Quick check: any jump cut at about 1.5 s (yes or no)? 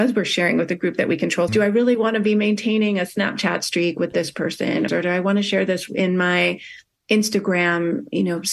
yes